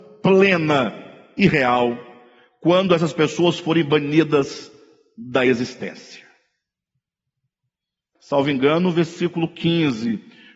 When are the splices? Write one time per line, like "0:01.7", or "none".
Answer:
0:08.2